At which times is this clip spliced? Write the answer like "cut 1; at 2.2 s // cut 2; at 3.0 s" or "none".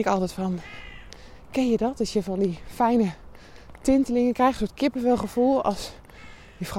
none